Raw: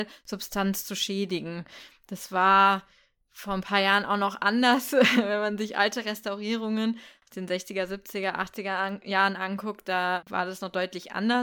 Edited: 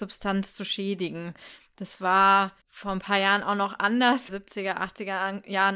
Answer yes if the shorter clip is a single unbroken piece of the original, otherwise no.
no